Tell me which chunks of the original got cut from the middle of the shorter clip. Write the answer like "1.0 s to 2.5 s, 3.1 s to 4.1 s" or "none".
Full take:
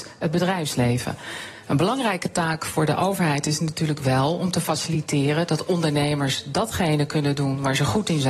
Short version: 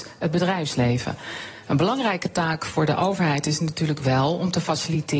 none